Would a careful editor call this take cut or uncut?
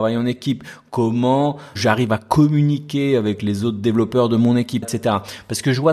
cut